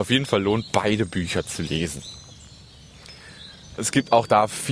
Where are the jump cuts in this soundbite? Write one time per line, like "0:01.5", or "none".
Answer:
0:03.8